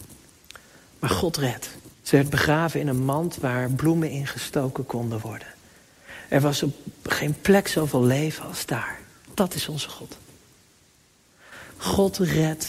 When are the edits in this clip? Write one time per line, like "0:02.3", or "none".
0:01.9